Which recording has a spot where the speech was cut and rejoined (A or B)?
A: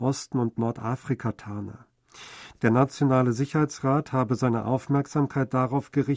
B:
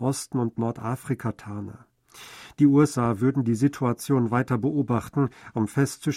A